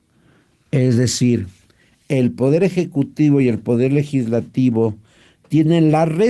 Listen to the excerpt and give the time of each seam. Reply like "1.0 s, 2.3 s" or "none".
none